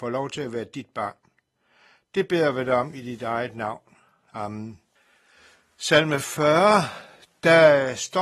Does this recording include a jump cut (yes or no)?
no